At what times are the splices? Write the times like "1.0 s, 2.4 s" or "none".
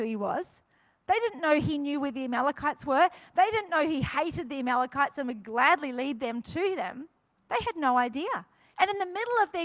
8.7 s